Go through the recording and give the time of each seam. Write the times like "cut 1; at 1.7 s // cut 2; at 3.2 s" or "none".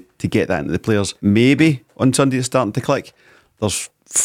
cut 1; at 1.2 s